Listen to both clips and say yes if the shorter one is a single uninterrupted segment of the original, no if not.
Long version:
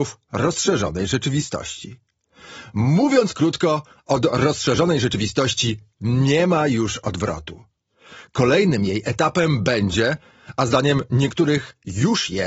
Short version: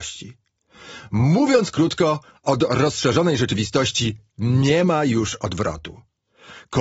yes